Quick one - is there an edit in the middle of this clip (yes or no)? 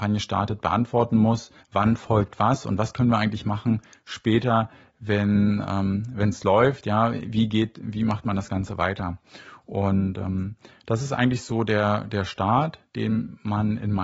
yes